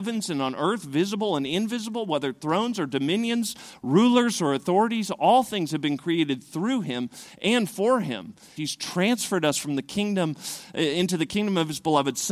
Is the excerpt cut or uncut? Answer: cut